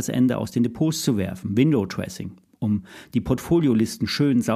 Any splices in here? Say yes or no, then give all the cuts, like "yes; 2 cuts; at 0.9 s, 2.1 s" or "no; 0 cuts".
no; 0 cuts